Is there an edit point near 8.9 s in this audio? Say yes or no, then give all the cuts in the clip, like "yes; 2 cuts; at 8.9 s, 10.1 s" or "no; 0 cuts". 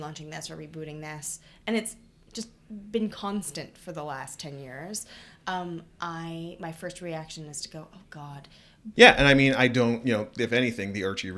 yes; 1 cut; at 8.9 s